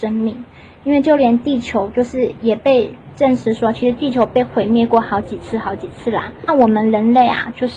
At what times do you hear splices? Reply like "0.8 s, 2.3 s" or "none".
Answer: none

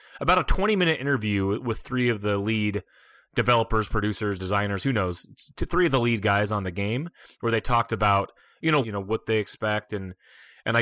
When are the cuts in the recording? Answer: 8.8 s

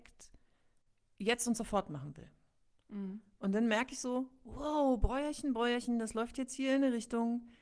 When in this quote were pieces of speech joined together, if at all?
none

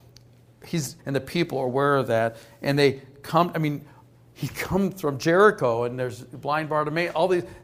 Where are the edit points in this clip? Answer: 1.0 s

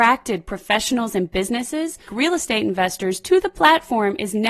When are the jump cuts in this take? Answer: 2.1 s

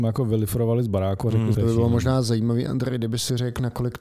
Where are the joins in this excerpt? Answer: 1.5 s

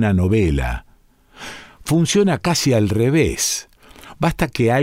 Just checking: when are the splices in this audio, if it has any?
none

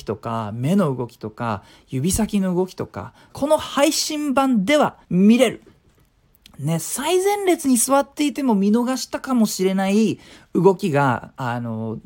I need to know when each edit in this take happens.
3.3 s, 5.0 s

